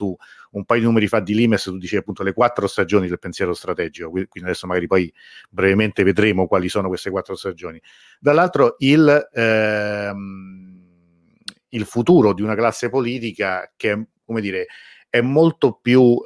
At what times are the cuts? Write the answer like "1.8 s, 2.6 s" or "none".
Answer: none